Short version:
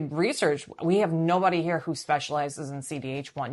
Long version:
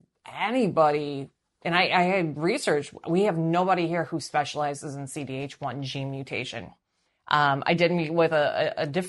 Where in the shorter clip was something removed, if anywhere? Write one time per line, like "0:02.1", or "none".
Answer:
none